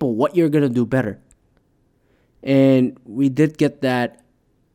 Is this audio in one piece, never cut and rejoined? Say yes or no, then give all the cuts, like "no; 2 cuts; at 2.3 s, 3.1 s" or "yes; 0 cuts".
yes; 0 cuts